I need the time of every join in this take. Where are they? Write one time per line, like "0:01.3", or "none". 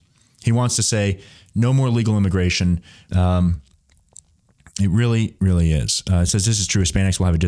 0:03.1